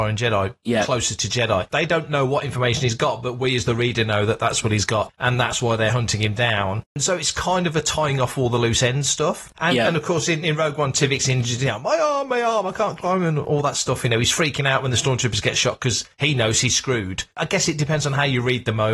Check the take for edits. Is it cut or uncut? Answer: uncut